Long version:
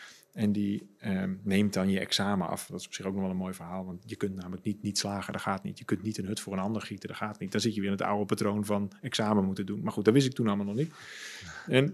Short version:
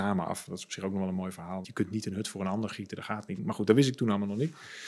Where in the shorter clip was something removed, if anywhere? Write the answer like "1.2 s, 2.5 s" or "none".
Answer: 1.6 s, 3.4 s